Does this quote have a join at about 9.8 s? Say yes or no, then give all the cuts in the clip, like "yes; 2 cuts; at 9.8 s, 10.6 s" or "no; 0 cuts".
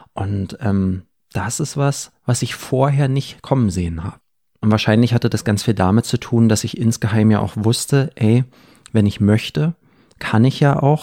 no; 0 cuts